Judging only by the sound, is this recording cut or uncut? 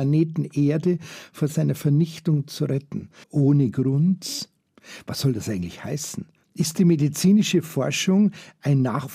cut